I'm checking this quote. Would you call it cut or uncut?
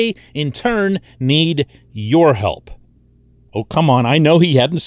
cut